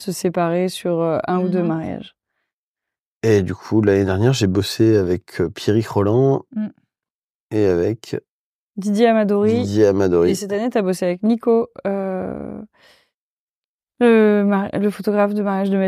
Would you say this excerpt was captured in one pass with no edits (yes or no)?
yes